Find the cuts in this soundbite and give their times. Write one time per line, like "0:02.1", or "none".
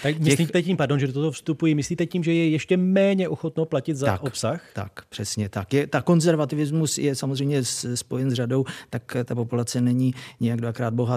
none